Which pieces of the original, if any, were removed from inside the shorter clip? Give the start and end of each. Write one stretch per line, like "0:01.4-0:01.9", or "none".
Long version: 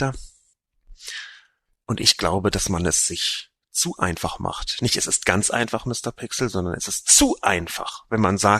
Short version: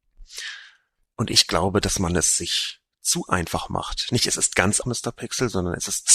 0:05.5-0:05.8